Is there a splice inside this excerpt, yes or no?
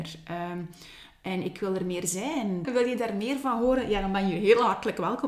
yes